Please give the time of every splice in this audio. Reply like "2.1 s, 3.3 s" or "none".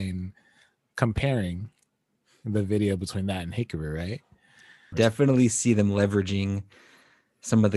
4.9 s